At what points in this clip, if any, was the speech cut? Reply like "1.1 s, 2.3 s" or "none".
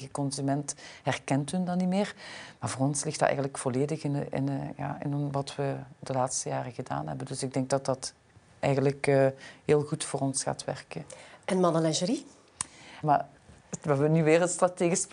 13.0 s